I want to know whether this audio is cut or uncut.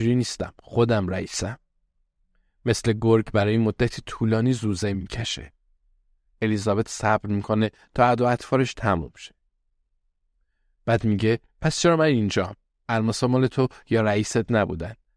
uncut